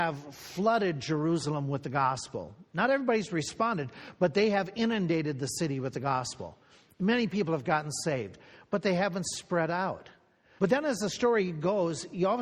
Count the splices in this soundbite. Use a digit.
1